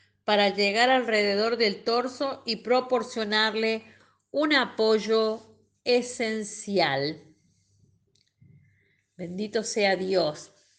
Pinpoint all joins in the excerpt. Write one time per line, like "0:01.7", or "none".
none